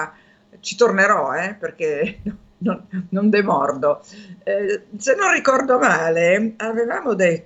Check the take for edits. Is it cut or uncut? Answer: uncut